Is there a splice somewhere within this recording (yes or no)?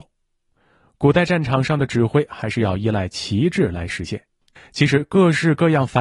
yes